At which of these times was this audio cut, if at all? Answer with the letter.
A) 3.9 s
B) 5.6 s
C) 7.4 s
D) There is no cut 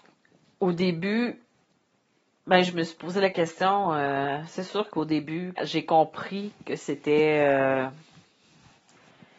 B